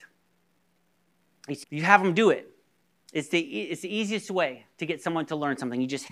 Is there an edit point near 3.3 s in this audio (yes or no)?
no